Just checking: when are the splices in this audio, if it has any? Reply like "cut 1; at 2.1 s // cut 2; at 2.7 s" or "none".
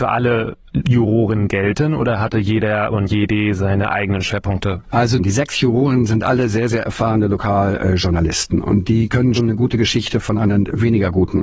cut 1; at 9.4 s